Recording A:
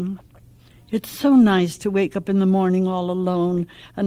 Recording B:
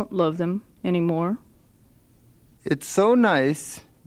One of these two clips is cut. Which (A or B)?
B